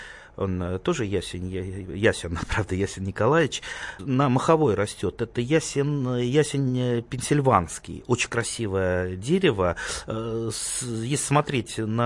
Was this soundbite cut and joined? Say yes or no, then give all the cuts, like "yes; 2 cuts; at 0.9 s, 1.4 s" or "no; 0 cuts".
yes; 1 cut; at 4.0 s